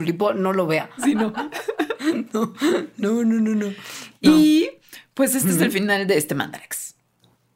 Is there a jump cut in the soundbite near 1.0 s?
yes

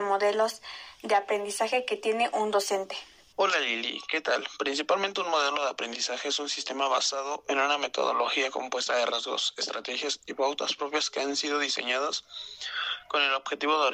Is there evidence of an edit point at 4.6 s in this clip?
no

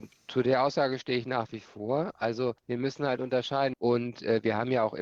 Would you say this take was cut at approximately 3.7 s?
yes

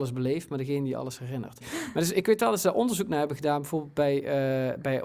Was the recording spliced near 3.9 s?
no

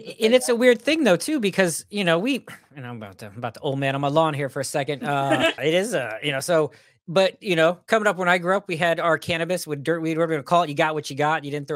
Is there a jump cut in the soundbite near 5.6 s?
yes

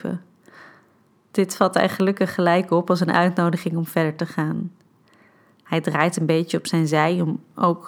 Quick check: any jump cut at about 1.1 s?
no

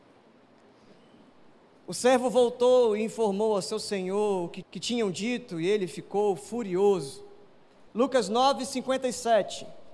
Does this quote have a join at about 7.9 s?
yes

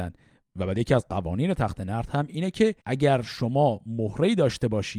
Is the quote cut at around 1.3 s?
no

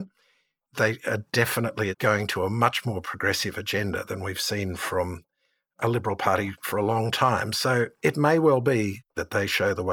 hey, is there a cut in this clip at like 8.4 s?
no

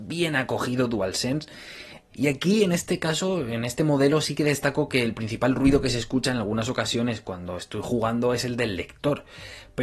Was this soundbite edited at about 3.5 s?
no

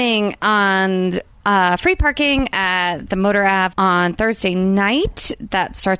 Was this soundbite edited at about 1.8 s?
no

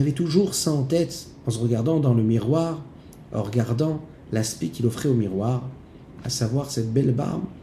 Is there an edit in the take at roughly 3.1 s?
no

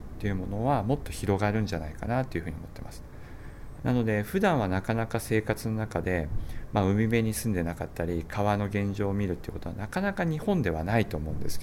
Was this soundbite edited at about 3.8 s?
yes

